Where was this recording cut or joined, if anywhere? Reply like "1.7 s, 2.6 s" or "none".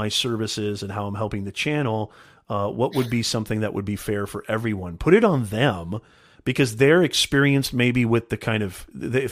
none